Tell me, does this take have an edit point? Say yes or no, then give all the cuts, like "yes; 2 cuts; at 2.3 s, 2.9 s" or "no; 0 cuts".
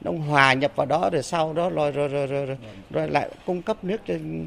no; 0 cuts